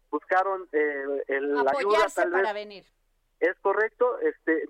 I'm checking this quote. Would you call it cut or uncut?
uncut